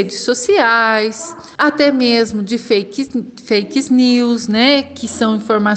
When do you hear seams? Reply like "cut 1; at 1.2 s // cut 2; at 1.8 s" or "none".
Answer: cut 1; at 1.6 s